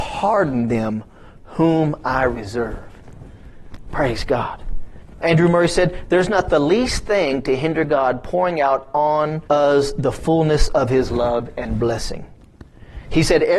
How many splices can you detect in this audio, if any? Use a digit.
0